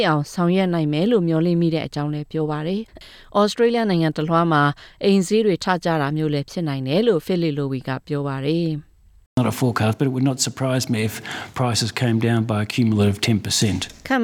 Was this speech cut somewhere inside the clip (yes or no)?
yes